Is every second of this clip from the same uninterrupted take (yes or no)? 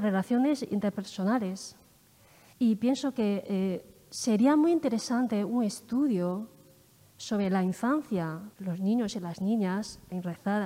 no